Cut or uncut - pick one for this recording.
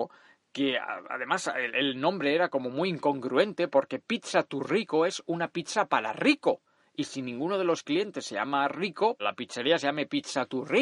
cut